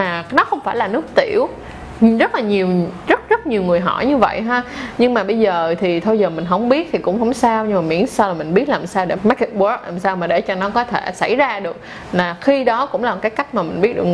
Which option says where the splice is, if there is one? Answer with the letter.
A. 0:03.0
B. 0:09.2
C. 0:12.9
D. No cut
B